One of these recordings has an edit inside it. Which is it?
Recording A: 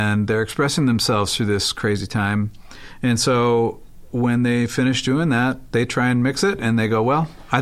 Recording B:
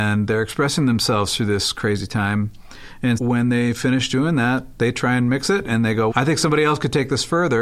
B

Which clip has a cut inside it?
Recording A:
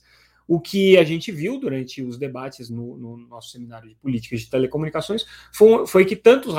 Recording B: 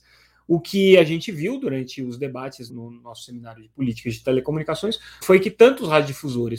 B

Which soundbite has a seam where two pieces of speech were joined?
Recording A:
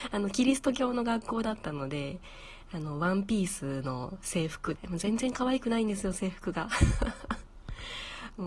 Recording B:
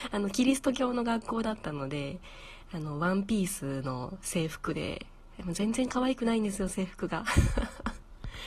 A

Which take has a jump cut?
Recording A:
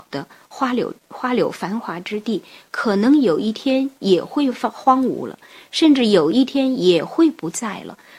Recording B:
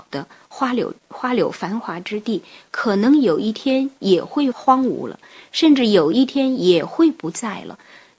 B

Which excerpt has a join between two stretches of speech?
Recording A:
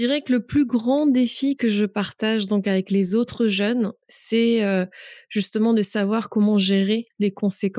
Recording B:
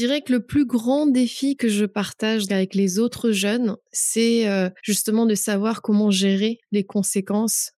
B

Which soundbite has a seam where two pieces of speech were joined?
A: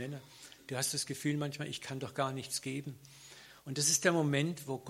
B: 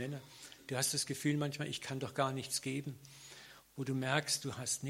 B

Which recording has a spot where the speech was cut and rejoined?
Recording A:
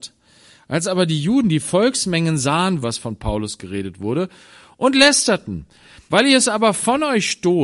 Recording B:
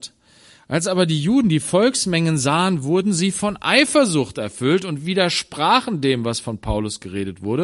A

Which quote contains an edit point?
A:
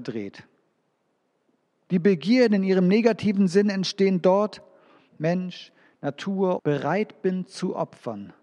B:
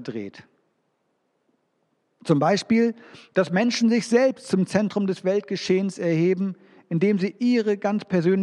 A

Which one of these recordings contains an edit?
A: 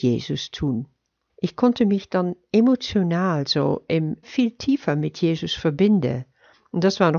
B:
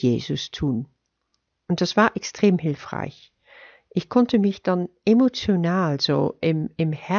A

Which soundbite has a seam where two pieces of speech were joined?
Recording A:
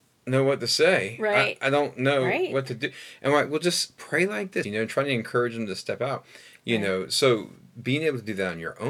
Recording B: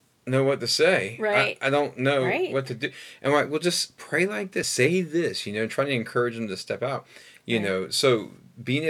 A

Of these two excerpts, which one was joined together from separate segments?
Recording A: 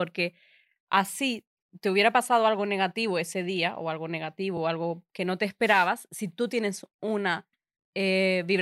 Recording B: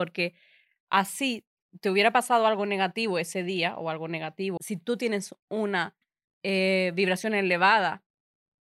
B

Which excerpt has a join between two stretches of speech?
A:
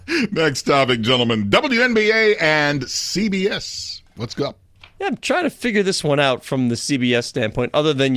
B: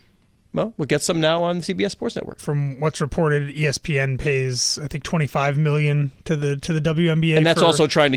B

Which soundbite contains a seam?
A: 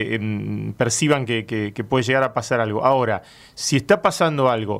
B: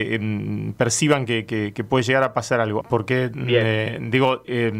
B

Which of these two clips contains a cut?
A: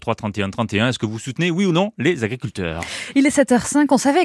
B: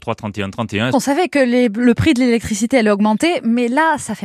B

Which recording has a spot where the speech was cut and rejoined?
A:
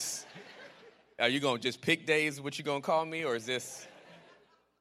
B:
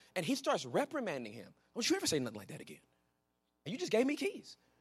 B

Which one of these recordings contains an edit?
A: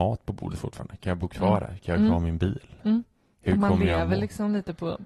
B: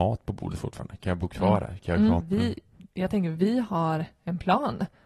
B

